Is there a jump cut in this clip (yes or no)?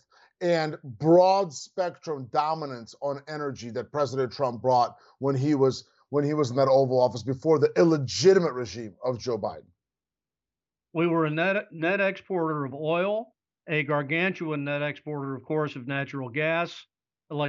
no